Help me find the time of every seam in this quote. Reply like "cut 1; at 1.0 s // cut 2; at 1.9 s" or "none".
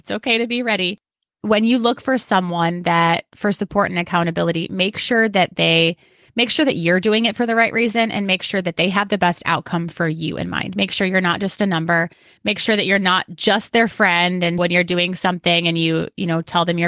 cut 1; at 14.6 s